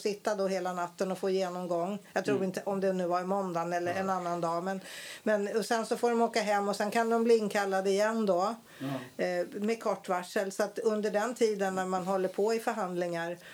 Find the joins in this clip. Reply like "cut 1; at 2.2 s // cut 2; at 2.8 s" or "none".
none